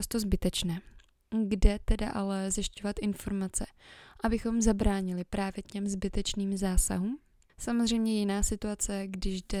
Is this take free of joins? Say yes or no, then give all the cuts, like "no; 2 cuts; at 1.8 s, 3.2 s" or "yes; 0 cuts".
no; 2 cuts; at 5.6 s, 7.5 s